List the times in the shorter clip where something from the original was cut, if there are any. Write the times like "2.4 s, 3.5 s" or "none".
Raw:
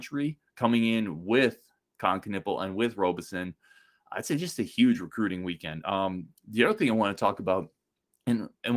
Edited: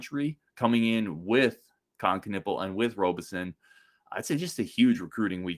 none